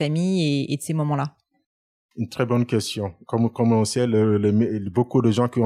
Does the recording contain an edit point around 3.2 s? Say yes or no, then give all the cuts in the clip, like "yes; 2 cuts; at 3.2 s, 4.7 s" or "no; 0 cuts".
yes; 1 cut; at 3.2 s